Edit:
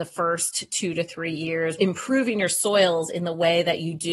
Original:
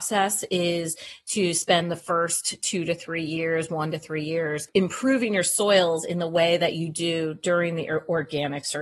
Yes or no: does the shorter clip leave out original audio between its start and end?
yes